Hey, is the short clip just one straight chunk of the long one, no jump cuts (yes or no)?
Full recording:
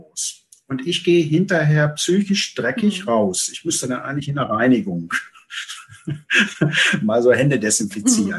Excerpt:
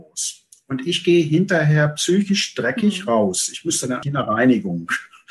no